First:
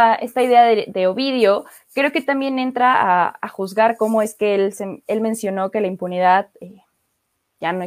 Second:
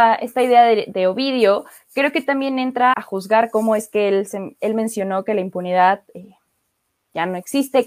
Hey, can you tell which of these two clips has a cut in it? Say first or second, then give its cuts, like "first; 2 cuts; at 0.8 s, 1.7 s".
second; 1 cut; at 2.9 s